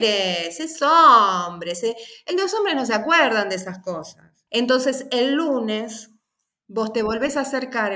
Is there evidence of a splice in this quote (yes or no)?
no